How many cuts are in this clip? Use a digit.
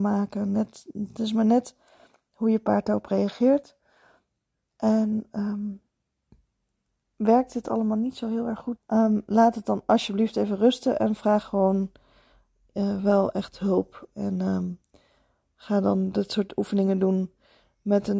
1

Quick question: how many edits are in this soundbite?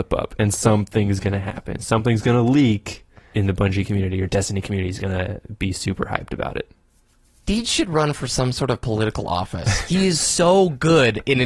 1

